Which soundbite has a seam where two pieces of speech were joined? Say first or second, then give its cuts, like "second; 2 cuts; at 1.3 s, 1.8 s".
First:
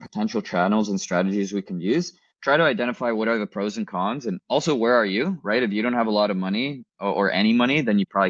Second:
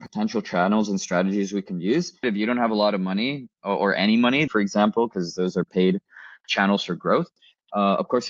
second; 2 cuts; at 2.2 s, 4.5 s